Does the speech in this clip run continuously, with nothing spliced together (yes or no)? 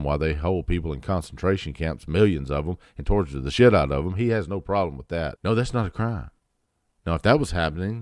no